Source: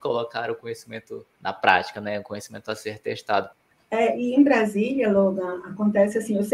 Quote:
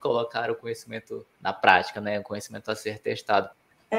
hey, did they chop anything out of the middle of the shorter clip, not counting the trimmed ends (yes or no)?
no